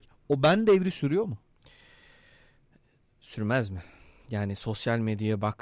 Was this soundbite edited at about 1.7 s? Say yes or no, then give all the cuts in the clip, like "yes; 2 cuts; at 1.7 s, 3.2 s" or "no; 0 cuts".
no; 0 cuts